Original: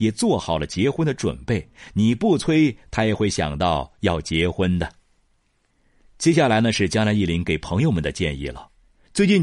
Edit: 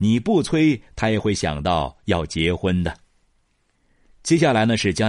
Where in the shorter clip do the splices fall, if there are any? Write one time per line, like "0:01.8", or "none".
none